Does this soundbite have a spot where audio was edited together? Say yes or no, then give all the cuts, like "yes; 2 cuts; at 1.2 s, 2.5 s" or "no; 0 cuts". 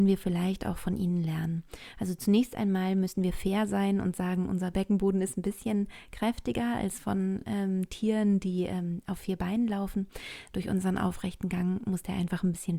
no; 0 cuts